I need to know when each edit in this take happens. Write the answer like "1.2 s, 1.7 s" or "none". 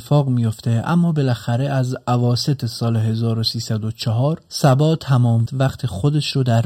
5.5 s